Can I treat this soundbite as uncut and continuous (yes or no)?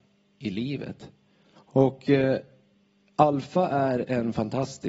no